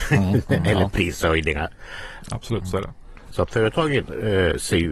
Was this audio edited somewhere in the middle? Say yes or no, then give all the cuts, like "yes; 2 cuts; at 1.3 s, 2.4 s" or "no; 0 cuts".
yes; 2 cuts; at 2.2 s, 3.3 s